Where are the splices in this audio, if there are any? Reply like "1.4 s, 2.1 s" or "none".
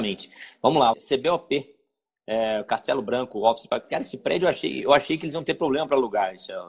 0.9 s